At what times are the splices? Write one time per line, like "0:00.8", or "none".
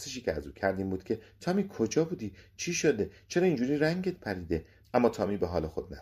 0:04.8